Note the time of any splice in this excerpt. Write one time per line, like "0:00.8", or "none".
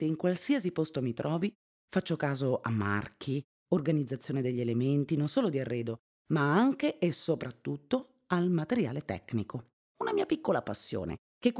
none